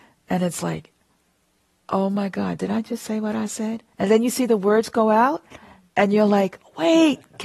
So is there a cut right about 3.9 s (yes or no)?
yes